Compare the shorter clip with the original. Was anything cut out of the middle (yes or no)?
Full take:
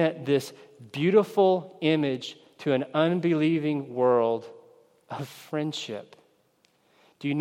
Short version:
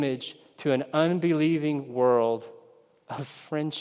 no